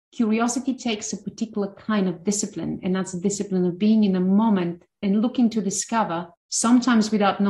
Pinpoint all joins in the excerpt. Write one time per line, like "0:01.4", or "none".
0:06.4